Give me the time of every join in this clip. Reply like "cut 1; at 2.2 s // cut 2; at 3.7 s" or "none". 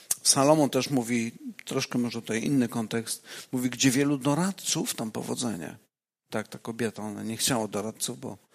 none